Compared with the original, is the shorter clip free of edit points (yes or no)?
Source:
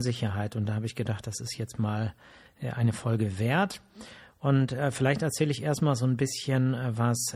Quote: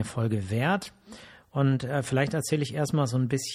yes